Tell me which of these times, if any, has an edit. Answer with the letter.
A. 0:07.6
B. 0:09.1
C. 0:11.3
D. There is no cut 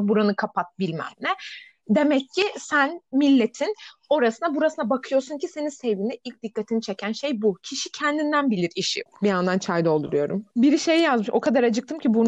B